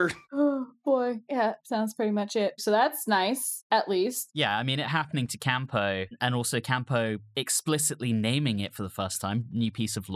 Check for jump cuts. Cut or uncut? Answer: cut